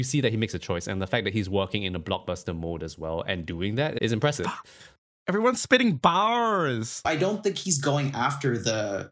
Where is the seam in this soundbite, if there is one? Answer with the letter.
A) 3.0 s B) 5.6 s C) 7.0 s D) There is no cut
C